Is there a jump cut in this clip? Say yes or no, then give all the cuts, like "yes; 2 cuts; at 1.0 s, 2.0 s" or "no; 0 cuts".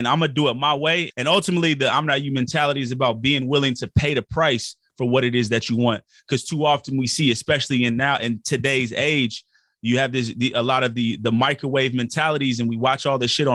yes; 1 cut; at 1.1 s